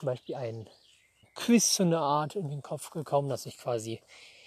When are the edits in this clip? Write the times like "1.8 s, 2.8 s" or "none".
1.2 s